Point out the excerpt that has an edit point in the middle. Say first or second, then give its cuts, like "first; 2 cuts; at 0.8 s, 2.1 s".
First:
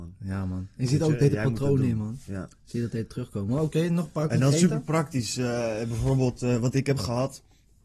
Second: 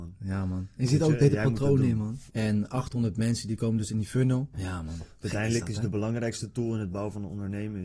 second; 2 cuts; at 2.3 s, 4.5 s